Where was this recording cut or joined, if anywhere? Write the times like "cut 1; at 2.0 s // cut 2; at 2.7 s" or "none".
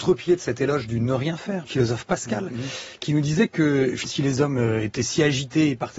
cut 1; at 1.7 s // cut 2; at 4.1 s